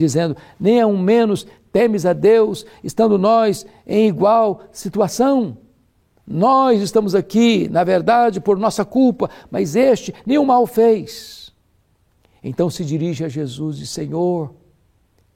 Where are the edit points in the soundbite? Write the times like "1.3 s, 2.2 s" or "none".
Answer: none